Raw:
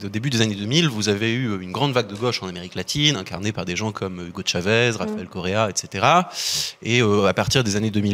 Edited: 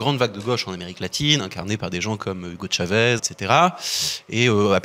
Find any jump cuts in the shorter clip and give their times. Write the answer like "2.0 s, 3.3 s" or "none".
3.2 s